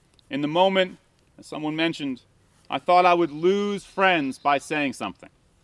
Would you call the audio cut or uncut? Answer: uncut